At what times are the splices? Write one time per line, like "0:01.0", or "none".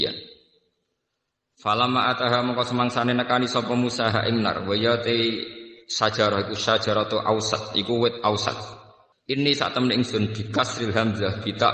0:09.1